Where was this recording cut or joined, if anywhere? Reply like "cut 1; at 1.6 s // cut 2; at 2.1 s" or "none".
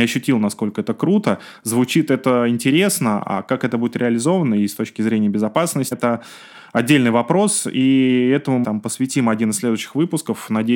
cut 1; at 5.9 s // cut 2; at 8.6 s